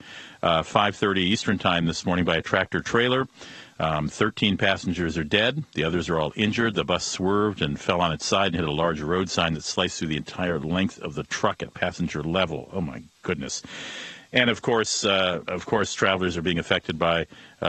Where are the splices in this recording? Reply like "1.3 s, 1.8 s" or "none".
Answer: 15.5 s